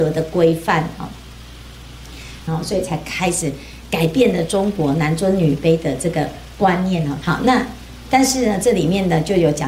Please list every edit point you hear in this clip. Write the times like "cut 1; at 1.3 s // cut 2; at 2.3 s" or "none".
cut 1; at 2.5 s // cut 2; at 7.2 s

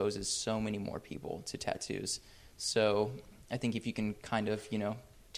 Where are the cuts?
none

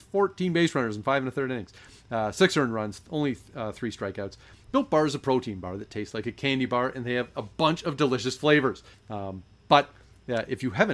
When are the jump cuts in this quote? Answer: cut 1; at 4.6 s // cut 2; at 8.9 s

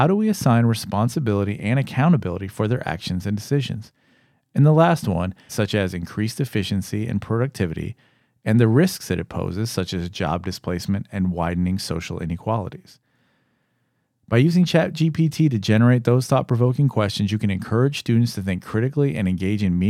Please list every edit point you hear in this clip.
cut 1; at 5.5 s

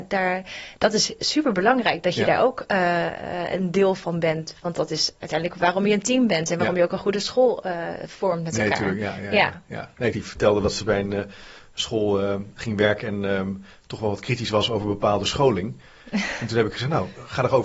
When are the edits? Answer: cut 1; at 10.1 s

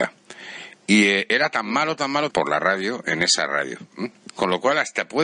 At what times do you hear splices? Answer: cut 1; at 2.3 s // cut 2; at 4.3 s

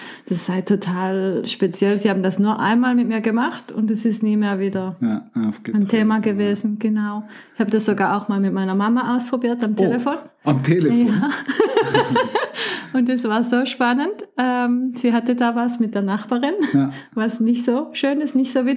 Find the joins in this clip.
none

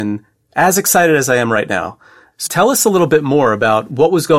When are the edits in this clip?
cut 1; at 2.5 s

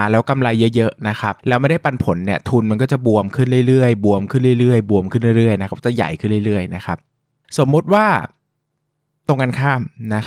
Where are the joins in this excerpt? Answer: none

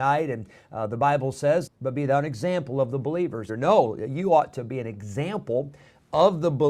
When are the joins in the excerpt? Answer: cut 1; at 1.7 s // cut 2; at 3.5 s

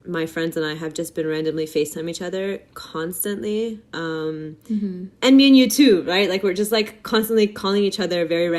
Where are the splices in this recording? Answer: none

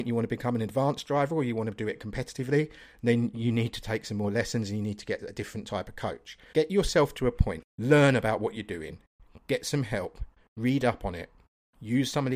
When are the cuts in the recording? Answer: cut 1; at 6.5 s // cut 2; at 7.6 s

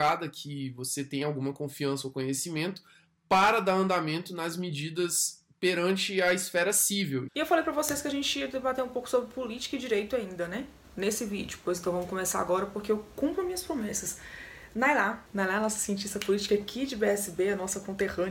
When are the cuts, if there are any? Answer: cut 1; at 7.3 s // cut 2; at 15.3 s

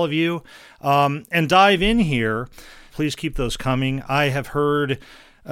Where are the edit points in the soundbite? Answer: cut 1; at 2.9 s

